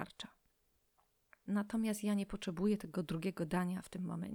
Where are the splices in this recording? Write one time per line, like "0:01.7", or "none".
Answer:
0:01.5